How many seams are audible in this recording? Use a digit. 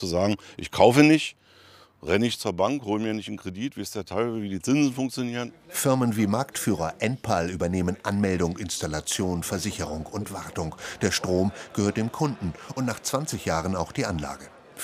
0